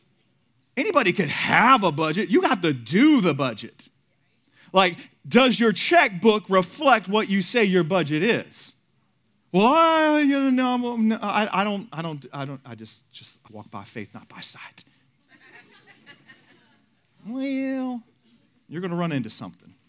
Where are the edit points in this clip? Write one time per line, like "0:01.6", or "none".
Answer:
0:13.5